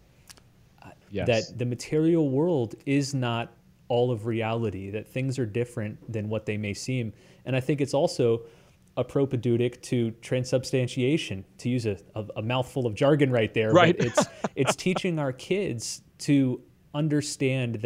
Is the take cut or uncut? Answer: cut